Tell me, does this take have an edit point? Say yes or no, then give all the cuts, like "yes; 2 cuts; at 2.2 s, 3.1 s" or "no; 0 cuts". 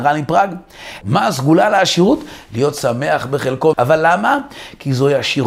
yes; 2 cuts; at 1.0 s, 3.7 s